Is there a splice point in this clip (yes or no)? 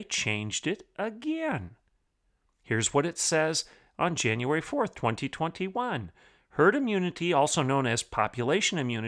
no